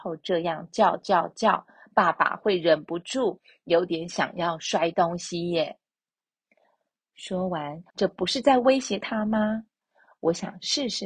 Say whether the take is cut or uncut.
cut